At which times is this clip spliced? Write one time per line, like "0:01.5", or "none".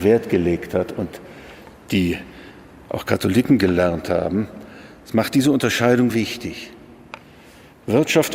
0:06.1